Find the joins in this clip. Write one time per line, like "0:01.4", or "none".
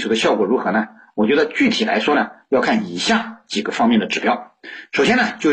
none